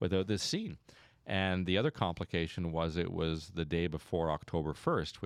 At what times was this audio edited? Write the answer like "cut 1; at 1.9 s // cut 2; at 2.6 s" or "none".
none

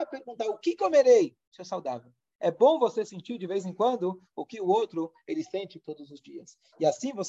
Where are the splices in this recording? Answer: none

